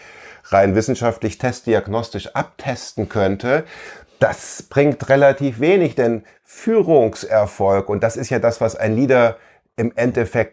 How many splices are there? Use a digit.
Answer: 0